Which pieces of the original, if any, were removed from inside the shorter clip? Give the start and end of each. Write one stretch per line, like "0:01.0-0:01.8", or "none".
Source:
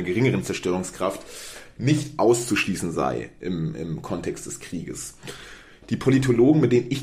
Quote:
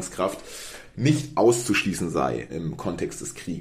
0:03.3-0:03.7